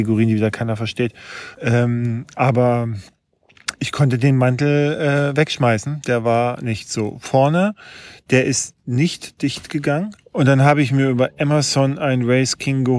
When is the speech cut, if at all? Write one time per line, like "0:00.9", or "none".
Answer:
0:01.5
0:10.2